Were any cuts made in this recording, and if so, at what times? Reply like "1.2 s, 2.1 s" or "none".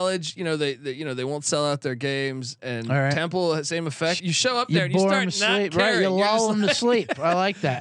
2.6 s, 4.2 s